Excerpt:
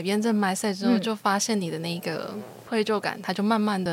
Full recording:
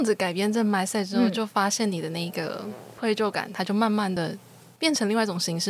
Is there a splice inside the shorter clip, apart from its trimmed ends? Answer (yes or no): no